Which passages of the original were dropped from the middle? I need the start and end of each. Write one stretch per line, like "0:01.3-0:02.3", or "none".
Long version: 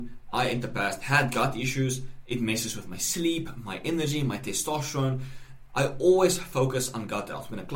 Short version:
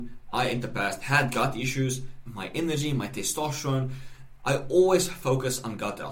0:02.3-0:03.6